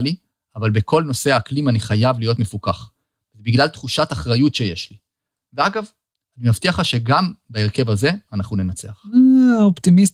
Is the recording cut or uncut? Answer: uncut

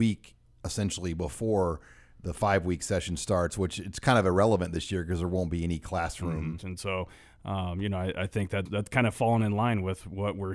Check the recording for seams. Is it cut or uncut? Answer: cut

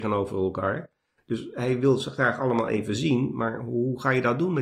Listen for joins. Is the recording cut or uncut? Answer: uncut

